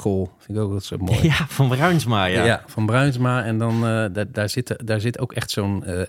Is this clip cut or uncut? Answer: uncut